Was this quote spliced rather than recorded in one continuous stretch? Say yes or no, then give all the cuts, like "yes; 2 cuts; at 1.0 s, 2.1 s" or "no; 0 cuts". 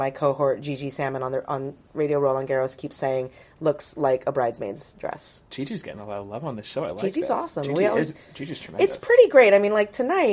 no; 0 cuts